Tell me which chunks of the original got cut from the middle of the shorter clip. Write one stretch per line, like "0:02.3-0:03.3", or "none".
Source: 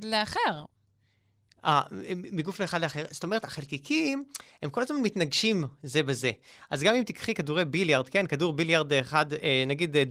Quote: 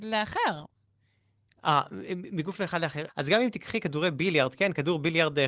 0:03.1-0:06.6